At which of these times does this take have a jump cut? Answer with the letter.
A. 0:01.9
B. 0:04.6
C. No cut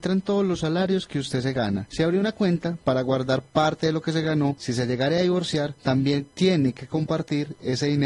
C